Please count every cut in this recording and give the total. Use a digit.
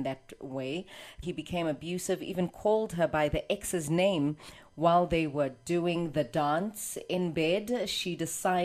1